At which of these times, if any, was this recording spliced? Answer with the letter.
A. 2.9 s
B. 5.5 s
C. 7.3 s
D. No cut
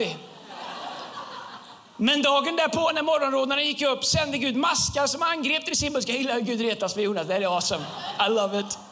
D